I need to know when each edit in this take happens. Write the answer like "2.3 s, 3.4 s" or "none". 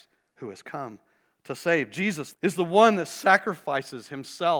2.3 s